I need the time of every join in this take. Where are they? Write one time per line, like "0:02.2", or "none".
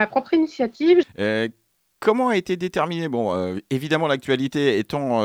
0:01.0